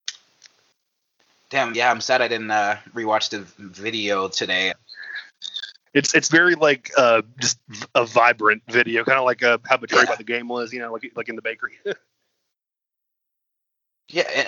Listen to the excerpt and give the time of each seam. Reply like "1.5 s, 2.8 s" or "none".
1.7 s, 4.7 s